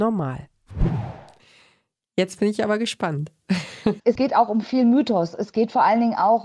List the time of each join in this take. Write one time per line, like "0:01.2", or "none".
0:04.0